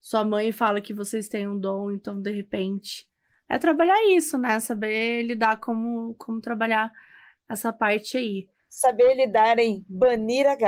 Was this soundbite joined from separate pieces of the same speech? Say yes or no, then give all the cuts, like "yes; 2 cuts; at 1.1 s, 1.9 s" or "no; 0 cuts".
no; 0 cuts